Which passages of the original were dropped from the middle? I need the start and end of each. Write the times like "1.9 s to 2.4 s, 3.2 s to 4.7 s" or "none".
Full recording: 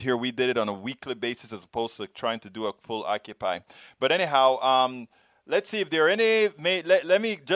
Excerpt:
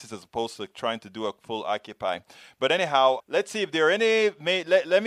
4.6 s to 5.4 s